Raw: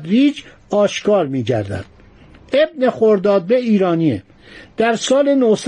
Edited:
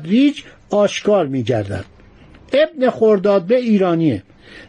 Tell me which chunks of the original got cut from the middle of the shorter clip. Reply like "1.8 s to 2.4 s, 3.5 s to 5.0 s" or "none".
none